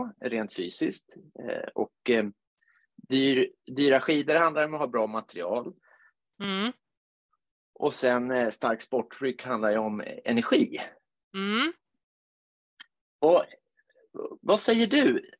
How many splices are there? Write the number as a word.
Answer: zero